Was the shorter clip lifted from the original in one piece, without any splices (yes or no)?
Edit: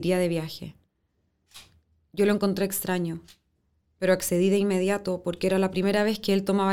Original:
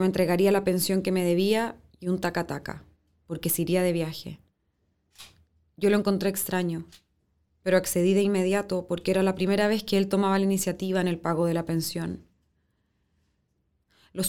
yes